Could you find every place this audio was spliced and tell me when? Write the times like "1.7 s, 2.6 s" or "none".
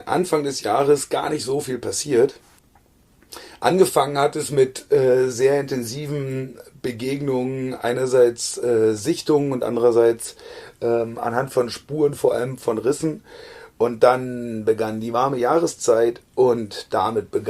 none